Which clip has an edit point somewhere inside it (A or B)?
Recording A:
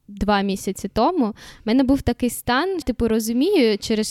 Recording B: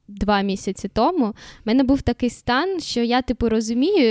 A